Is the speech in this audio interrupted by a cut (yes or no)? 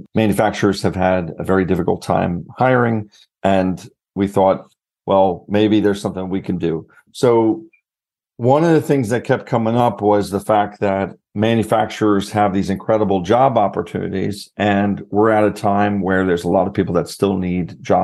no